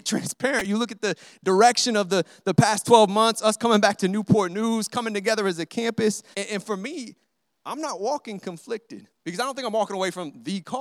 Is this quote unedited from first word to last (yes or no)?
no